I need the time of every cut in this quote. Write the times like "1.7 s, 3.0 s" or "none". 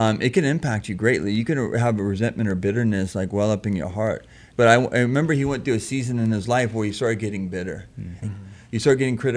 4.5 s, 8.2 s